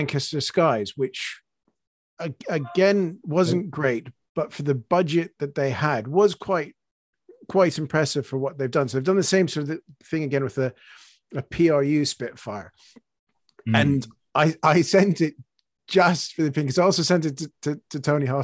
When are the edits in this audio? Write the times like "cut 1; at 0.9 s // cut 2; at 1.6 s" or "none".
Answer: none